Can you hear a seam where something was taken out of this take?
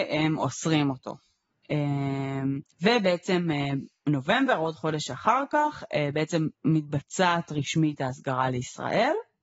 yes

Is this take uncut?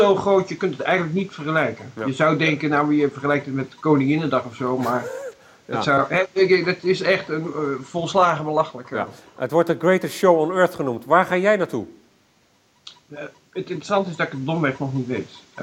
yes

